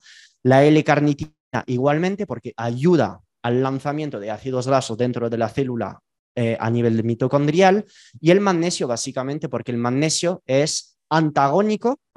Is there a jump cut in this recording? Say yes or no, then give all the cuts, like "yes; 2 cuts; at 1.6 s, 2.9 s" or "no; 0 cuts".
no; 0 cuts